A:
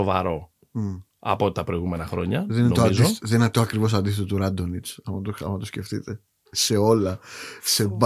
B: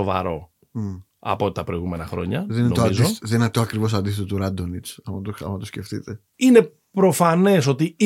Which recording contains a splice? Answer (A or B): B